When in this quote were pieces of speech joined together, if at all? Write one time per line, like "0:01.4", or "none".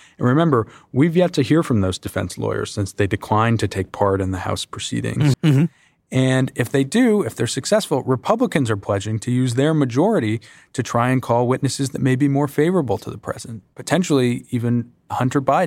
0:05.3
0:13.7